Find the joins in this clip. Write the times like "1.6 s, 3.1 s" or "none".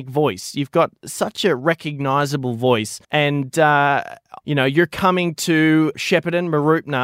3.0 s, 4.4 s, 5.9 s